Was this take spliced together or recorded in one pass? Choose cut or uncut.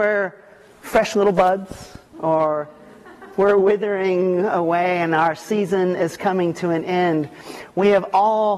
cut